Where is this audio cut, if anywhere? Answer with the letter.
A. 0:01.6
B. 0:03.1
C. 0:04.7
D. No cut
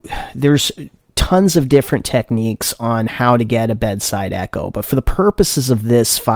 D